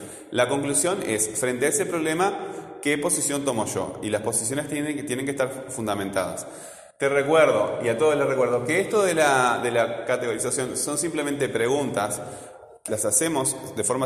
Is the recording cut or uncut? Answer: cut